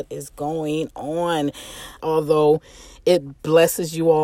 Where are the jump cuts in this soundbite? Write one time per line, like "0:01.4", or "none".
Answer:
0:02.0